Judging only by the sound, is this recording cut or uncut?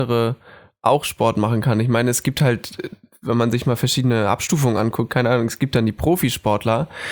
uncut